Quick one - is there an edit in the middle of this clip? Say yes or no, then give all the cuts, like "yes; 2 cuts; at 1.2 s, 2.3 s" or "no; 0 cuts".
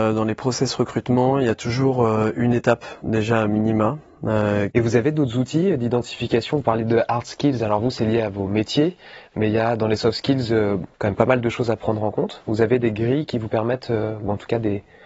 yes; 2 cuts; at 4.7 s, 10.9 s